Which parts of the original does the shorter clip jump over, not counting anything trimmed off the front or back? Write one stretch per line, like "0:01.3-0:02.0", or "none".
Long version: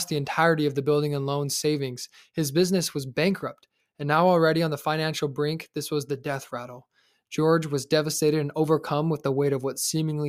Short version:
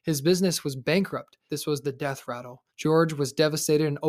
0:03.8-0:05.7
0:06.9-0:07.2